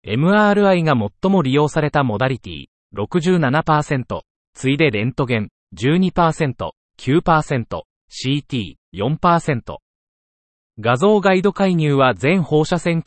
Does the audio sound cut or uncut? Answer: cut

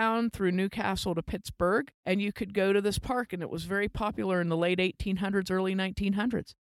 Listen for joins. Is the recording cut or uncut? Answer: cut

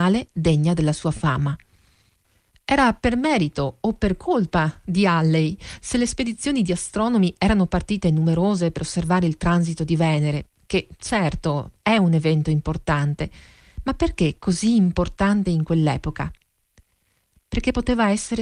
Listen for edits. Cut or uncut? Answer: uncut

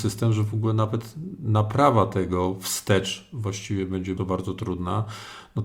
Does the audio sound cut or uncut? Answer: cut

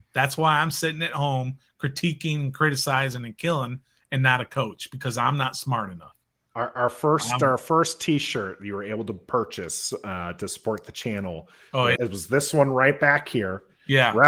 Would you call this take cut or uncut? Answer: cut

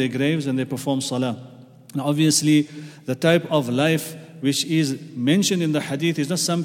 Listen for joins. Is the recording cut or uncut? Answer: uncut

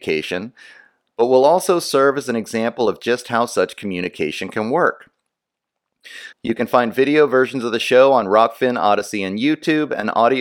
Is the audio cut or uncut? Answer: cut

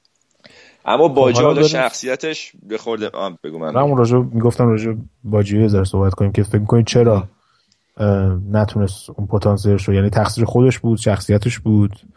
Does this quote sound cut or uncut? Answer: cut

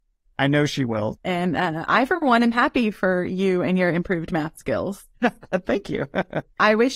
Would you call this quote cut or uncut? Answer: cut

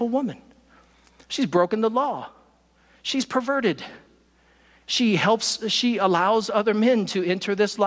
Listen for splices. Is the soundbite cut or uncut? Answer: uncut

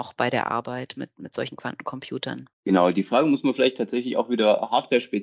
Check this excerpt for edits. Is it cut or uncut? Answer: cut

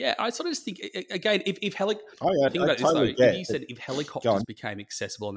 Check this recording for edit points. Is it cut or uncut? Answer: cut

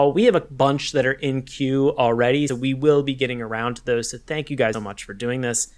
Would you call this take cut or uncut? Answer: cut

